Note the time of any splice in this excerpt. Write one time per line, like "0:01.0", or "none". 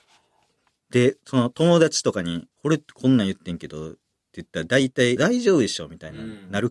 0:02.5
0:05.2